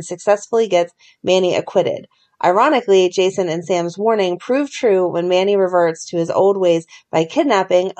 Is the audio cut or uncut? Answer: uncut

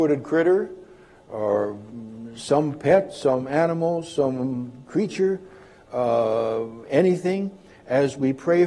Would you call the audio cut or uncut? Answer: uncut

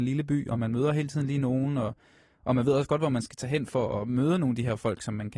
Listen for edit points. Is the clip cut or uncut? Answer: uncut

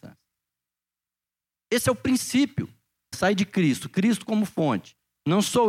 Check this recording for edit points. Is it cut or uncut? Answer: cut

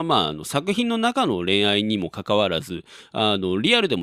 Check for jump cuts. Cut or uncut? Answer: uncut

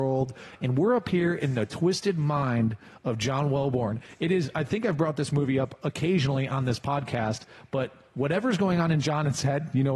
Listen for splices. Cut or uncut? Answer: uncut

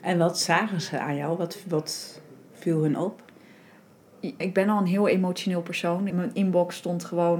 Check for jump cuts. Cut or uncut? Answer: cut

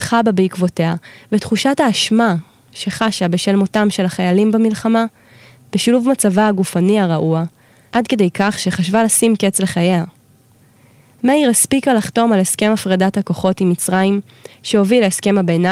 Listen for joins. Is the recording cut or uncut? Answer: cut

